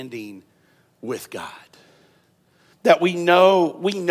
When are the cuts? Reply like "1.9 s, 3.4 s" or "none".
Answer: 2.7 s